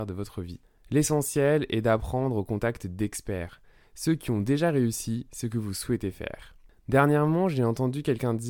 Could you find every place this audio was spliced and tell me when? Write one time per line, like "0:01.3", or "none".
none